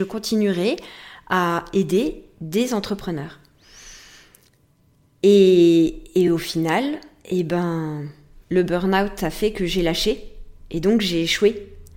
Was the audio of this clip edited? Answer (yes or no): no